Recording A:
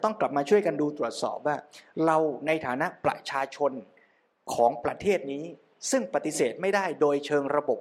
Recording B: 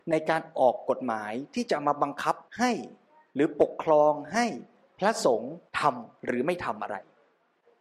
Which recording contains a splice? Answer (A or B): B